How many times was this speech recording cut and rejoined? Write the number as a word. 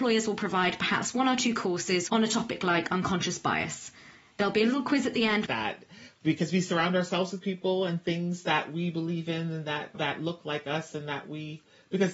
three